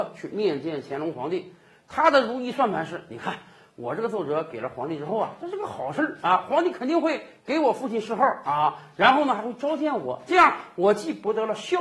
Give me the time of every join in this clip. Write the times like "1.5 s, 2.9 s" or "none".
none